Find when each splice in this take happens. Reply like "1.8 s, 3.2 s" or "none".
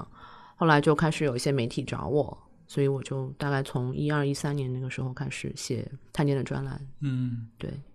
6.1 s